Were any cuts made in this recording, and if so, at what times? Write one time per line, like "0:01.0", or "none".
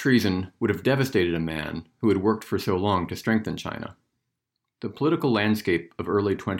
none